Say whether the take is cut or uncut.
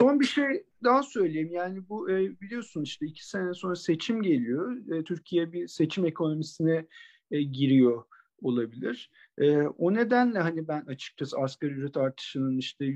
uncut